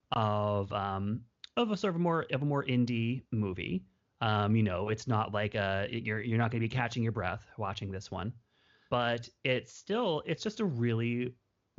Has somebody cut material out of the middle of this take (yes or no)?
no